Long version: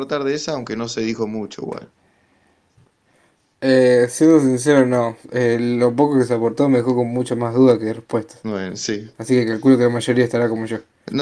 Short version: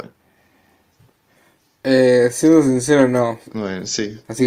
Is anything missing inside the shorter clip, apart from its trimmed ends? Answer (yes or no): yes